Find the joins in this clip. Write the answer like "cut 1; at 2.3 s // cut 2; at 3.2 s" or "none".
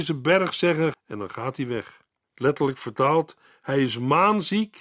cut 1; at 0.9 s // cut 2; at 2.2 s